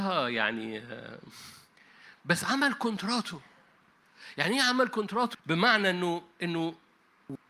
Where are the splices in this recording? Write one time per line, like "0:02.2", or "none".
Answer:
0:05.3